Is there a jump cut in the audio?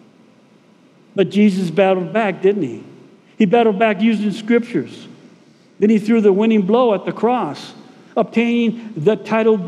no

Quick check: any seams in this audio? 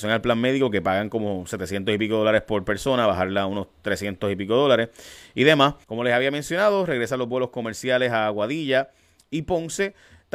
yes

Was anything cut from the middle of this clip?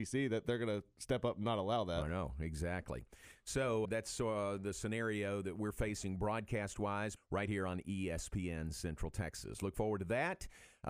yes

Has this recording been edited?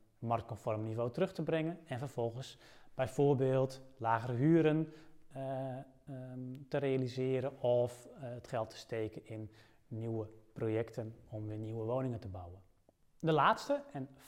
no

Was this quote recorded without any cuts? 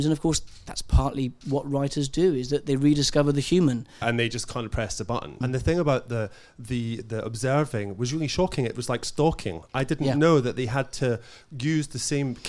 no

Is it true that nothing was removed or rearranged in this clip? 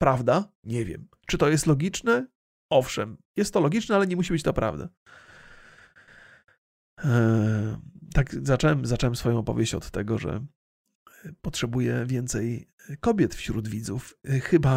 yes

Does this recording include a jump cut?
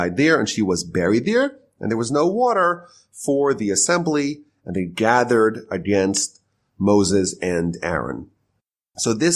no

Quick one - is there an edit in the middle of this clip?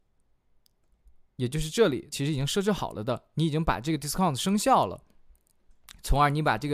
yes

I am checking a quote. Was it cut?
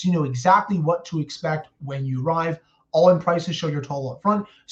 no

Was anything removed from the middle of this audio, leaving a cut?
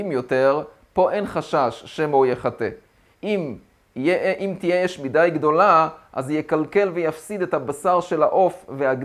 yes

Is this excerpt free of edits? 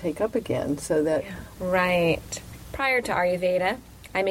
no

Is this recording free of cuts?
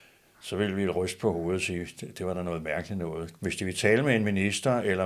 no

